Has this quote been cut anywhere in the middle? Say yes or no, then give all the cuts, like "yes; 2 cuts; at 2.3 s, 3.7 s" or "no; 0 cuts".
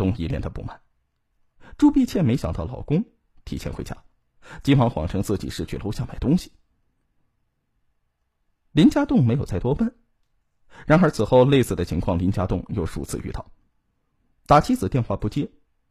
no; 0 cuts